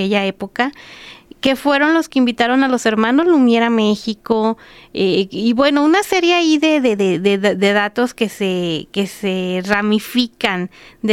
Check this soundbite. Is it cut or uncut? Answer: uncut